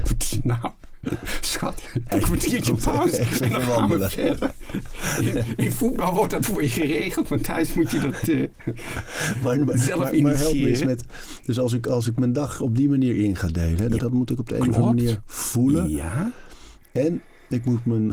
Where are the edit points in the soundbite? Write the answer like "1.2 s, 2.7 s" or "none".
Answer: 2.1 s, 14.0 s